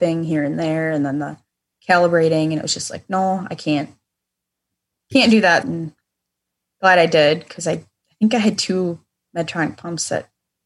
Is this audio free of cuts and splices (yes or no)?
no